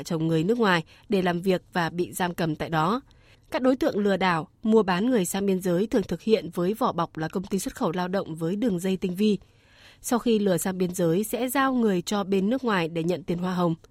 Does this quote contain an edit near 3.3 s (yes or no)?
yes